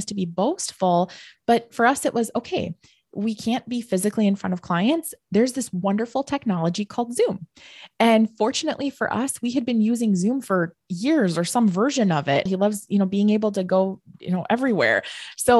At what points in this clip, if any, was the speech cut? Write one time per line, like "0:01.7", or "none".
0:12.5